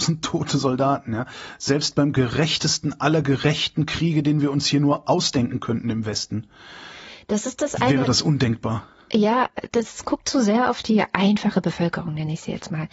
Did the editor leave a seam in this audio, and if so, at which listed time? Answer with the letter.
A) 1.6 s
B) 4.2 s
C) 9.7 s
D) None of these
C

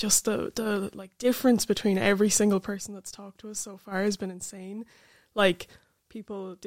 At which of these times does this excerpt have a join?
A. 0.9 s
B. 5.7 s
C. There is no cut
C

